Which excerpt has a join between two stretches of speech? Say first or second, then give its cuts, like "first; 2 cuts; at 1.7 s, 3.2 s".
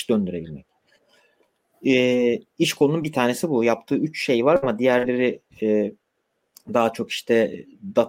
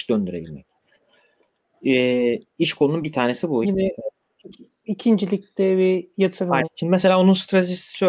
second; 2 cuts; at 3.6 s, 6.6 s